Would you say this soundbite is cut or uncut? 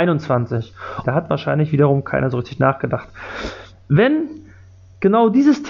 cut